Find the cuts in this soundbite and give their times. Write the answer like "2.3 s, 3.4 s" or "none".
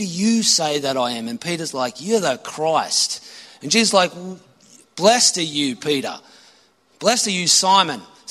3.4 s